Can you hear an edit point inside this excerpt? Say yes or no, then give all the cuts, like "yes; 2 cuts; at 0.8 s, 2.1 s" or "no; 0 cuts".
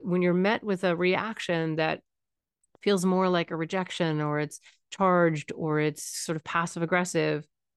no; 0 cuts